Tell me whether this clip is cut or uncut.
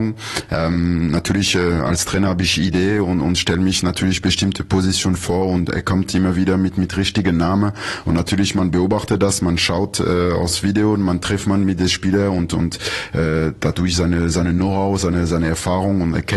uncut